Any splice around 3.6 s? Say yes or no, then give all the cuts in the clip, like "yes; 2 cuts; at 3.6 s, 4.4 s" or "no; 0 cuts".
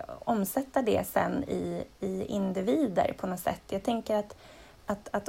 no; 0 cuts